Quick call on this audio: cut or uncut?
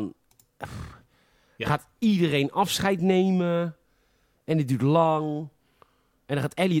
uncut